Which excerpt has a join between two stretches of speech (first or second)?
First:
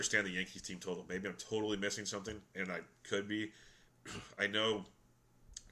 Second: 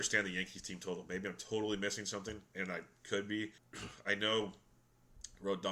second